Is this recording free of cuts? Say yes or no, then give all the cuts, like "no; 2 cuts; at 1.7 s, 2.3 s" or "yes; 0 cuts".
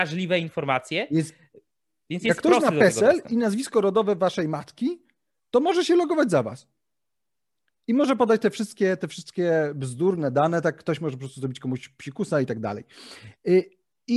yes; 0 cuts